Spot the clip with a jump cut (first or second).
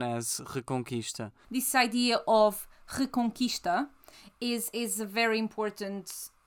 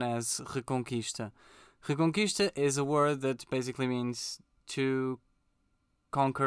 first